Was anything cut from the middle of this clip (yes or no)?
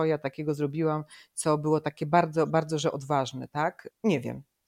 no